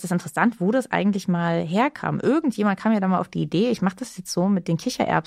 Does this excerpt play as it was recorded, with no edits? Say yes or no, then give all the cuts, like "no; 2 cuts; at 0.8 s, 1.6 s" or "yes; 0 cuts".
yes; 0 cuts